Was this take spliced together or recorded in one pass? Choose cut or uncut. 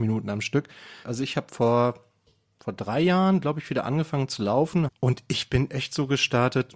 cut